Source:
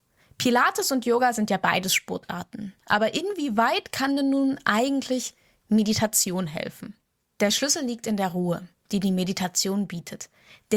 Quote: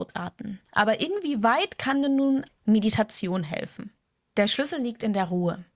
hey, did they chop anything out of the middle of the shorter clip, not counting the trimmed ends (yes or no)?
yes